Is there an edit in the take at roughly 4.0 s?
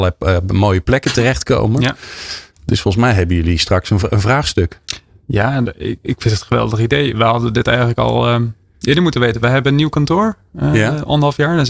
yes; 1 cut; at 4.0 s

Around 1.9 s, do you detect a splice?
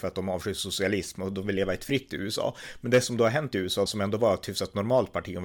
no; 1 cut; at 3.9 s

